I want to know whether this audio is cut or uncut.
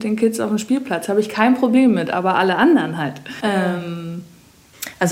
cut